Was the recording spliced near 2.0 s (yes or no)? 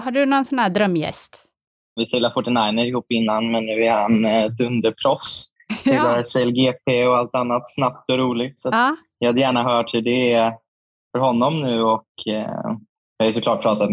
yes